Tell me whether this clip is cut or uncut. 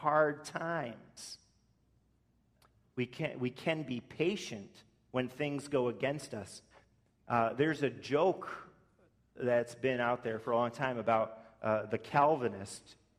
uncut